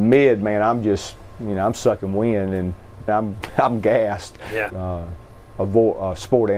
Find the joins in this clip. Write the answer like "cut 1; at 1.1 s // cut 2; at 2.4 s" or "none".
cut 1; at 3.1 s // cut 2; at 4.7 s